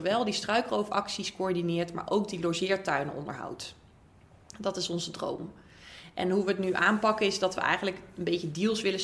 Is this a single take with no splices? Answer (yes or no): yes